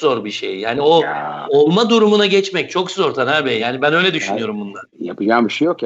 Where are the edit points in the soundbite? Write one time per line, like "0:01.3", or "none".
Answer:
none